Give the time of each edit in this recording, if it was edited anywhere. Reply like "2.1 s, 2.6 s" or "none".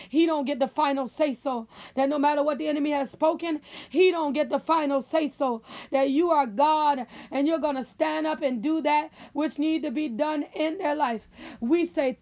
none